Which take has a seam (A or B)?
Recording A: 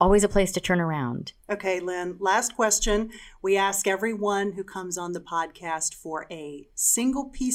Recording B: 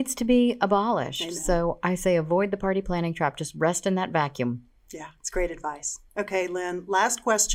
A